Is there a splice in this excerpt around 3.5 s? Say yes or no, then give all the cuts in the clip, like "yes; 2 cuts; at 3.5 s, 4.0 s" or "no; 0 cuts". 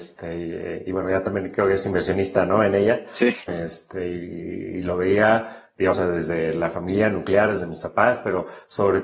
yes; 2 cuts; at 3.5 s, 5.9 s